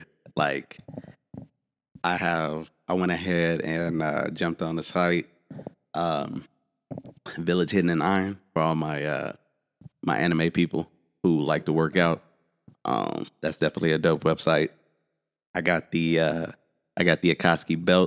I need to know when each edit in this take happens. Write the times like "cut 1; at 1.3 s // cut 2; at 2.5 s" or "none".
none